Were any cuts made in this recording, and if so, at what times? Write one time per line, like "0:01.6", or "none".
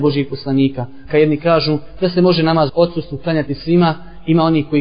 0:01.1
0:02.7